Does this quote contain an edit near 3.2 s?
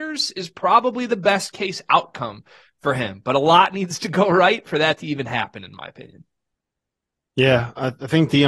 no; 0 cuts

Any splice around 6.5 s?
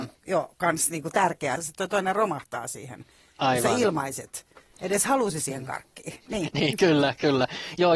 no; 1 cut; at 1.6 s

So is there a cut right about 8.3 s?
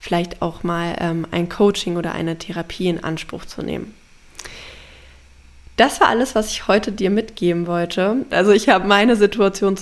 yes; 1 cut; at 8.3 s

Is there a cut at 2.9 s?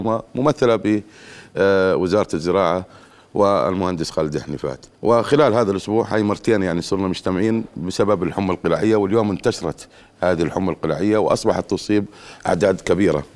no; 1 cut; at 4.9 s

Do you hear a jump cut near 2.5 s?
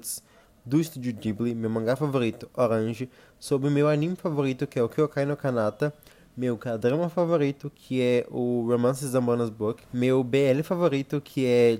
no; 0 cuts

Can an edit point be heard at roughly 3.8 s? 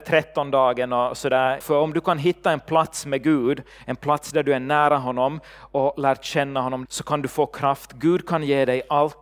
no; 2 cuts; at 1.6 s, 6.9 s

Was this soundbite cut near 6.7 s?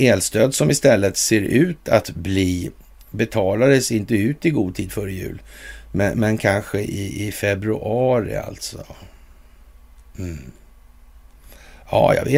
no; 0 cuts

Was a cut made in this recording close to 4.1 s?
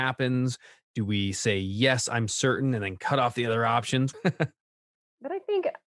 yes; 1 cut; at 4.1 s

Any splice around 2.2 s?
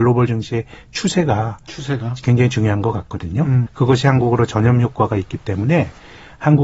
no; 1 cut; at 3.7 s

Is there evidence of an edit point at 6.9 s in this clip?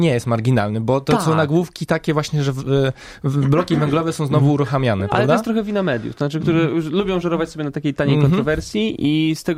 no; 0 cuts

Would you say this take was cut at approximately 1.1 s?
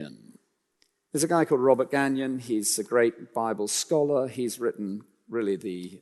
yes; 1 cut; at 1.1 s

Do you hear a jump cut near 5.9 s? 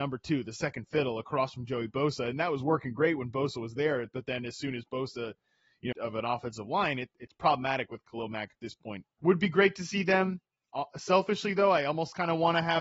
yes; 2 cuts; at 5.9 s, 9.0 s

